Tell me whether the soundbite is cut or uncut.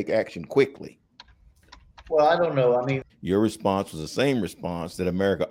cut